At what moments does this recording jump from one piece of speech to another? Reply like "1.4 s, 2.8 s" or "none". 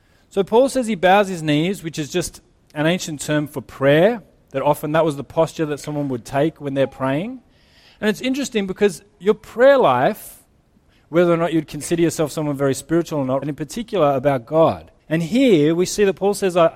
13.4 s, 15.0 s